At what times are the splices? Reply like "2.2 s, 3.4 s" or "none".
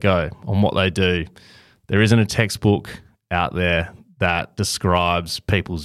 none